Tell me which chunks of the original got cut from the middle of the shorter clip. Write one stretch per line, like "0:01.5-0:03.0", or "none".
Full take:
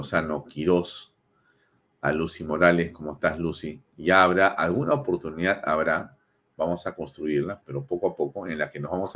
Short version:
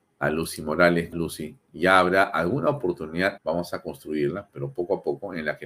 0:02.9-0:03.4
0:05.6-0:06.5

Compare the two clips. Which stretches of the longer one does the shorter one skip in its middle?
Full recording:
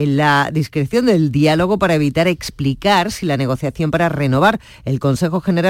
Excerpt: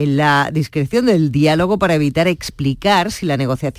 none

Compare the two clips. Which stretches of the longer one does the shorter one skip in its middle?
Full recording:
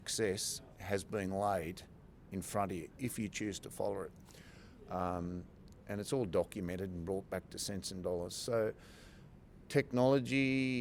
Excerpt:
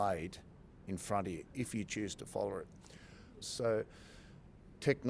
0:04.9-0:08.3

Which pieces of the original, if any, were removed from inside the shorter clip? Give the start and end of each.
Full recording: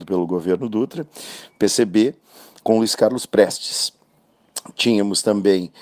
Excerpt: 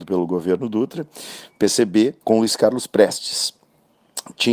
0:02.2-0:02.6

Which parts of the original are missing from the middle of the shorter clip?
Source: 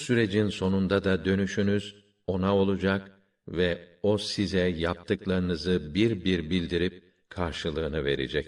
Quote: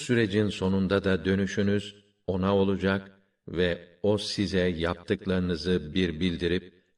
0:05.9-0:06.2

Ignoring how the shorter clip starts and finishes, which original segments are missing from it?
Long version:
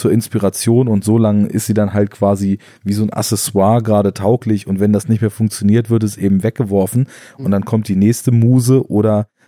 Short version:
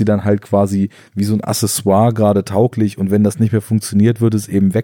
none

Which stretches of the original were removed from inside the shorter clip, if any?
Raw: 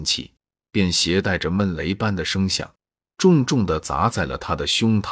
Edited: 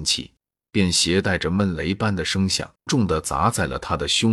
0:02.9-0:03.5

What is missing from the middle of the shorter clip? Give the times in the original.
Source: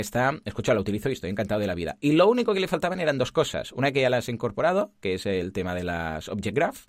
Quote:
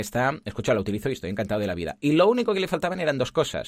none

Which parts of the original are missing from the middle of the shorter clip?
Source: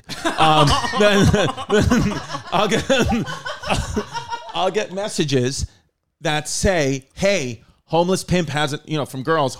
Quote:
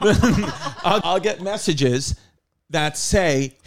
0:02.7-0:04.5

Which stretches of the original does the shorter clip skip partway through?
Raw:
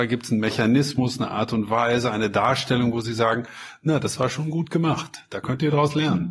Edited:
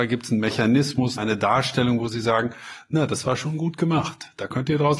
0:01.2-0:02.1

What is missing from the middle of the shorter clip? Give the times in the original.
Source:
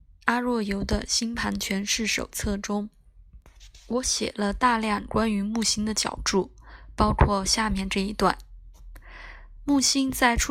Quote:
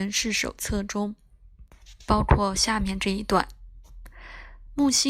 0:03.8-0:07.0

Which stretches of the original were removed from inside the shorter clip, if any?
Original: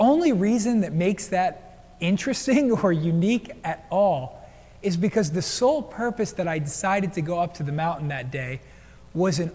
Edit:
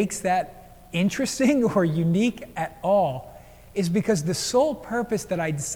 none

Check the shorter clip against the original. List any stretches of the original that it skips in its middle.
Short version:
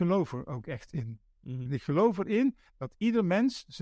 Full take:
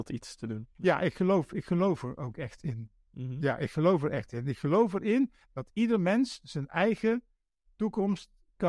0:03.4-0:04.4

